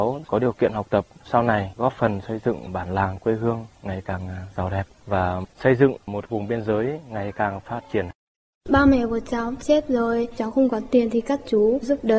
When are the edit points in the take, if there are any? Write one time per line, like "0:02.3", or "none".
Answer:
0:08.5
0:10.4